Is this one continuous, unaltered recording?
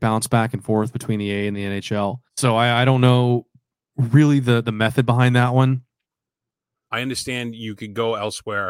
no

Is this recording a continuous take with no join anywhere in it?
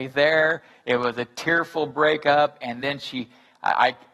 yes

